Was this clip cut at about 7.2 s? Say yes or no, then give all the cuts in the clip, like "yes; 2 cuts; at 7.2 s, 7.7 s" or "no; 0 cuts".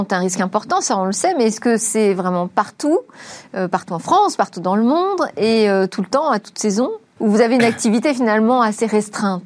yes; 1 cut; at 7.2 s